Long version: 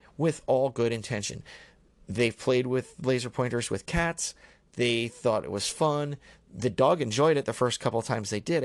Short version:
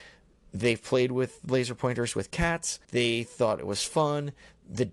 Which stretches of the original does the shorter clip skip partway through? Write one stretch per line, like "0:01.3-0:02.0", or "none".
0:04.4-0:04.7